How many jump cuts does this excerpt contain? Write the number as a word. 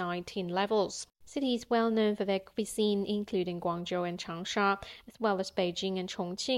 zero